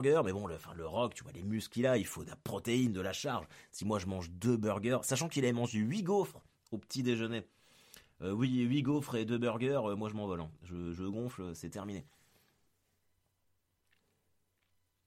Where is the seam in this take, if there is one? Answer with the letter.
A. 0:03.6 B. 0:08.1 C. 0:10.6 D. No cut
D